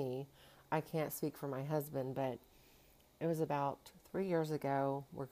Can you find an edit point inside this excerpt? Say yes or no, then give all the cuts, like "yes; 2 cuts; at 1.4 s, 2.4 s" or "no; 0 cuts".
no; 0 cuts